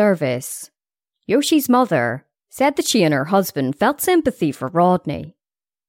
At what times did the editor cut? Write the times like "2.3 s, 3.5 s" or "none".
2.4 s